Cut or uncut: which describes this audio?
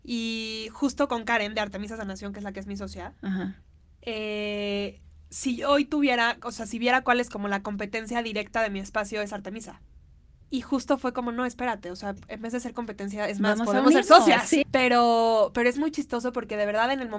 cut